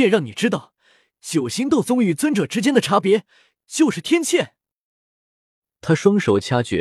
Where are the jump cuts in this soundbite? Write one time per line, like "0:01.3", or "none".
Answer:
none